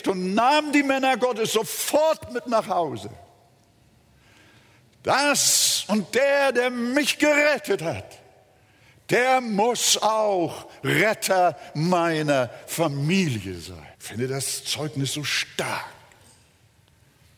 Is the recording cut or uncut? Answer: cut